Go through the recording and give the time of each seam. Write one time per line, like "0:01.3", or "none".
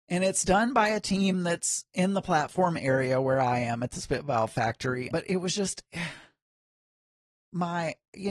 0:05.1